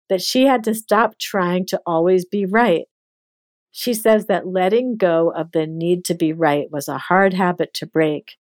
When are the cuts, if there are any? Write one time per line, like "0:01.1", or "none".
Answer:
none